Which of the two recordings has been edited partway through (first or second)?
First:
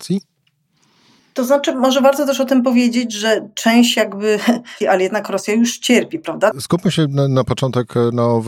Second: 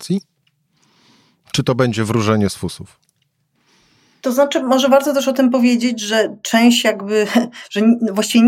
first